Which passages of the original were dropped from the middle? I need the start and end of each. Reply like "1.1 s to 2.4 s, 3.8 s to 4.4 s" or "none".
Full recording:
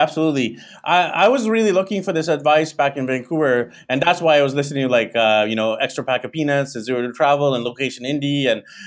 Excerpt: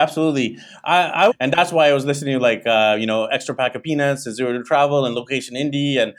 1.3 s to 3.8 s